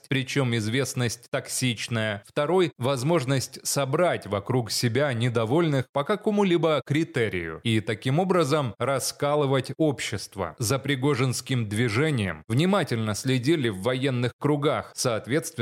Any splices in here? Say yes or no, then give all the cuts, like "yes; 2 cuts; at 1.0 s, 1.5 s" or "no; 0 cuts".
yes; 1 cut; at 10.6 s